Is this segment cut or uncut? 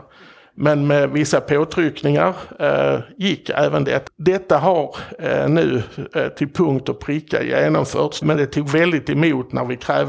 cut